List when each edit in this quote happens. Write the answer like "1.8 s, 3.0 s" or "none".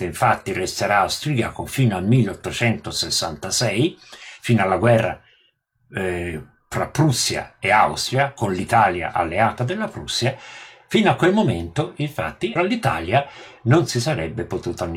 12.6 s